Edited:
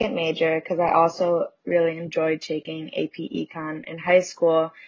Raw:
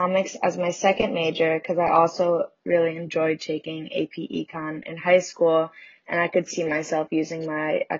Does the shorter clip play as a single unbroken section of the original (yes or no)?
yes